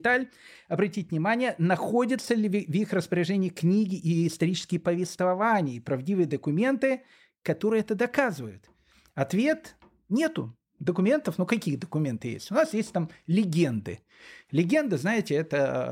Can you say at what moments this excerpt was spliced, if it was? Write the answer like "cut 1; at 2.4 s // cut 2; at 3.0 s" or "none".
none